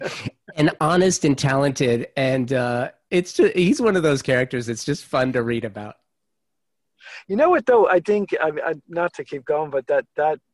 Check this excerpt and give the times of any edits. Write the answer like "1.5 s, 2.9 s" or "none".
none